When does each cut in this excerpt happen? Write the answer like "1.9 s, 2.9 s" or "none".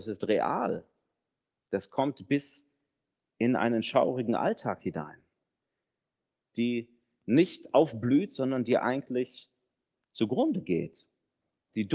6.5 s